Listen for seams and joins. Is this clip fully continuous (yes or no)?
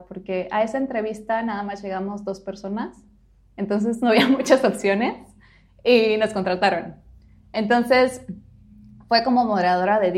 yes